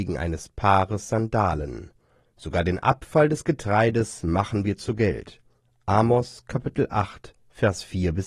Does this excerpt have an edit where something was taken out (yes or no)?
no